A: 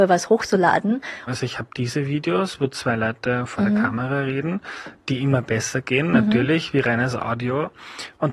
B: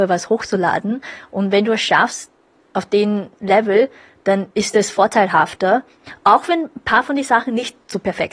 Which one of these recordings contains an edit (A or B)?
A